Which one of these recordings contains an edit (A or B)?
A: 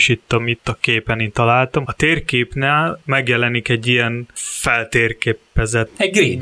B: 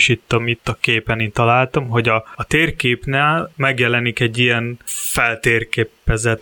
A